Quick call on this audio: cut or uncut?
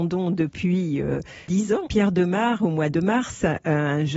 cut